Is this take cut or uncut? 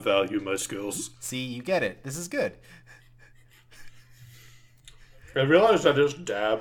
uncut